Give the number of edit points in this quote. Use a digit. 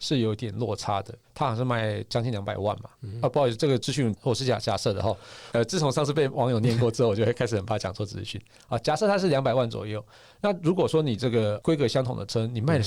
1